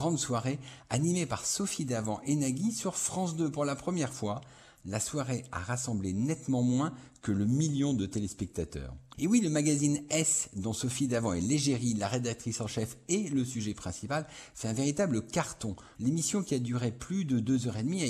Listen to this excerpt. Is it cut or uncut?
cut